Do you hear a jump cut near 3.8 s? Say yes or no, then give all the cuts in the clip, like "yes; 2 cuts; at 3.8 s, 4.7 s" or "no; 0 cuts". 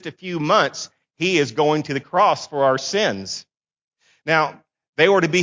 no; 0 cuts